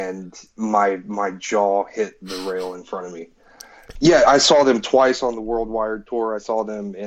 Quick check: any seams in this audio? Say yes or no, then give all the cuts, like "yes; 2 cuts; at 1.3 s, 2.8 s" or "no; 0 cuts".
yes; 1 cut; at 4.0 s